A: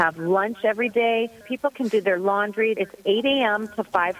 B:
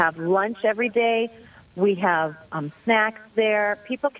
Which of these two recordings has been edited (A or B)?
A